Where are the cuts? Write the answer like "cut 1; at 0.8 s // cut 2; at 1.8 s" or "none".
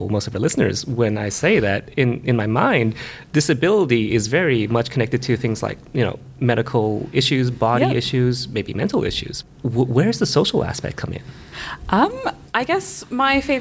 cut 1; at 9.4 s